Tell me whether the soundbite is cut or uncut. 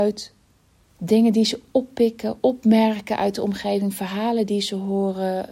uncut